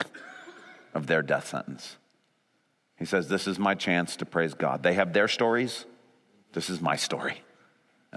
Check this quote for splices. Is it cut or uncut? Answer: uncut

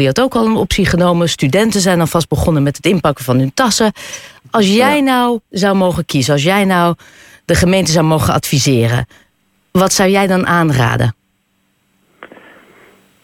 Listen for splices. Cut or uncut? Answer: uncut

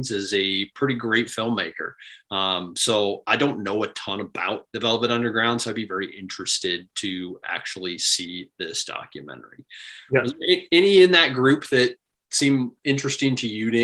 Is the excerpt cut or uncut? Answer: uncut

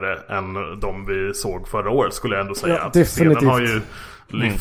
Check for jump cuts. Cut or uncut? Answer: uncut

